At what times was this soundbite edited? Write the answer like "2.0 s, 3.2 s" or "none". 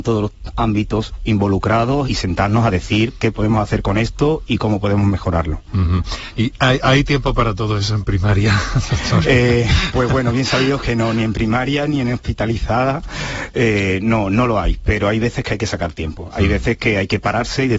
2.0 s